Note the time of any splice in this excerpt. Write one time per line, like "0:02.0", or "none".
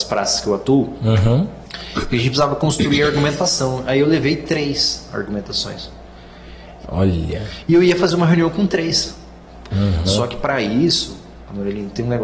0:06.8
0:09.7